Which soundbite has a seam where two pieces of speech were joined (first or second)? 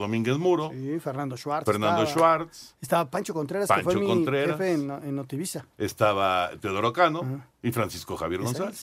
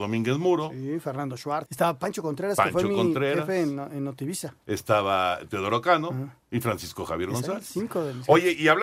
second